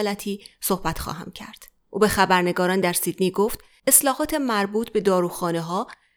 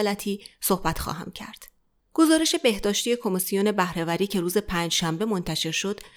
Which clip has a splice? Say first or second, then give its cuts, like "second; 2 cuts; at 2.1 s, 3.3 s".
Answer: first; 1 cut; at 1.9 s